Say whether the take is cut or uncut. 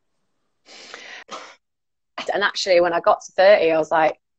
cut